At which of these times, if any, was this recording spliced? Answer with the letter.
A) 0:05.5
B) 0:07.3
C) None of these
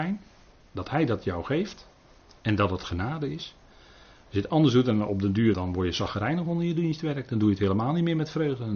A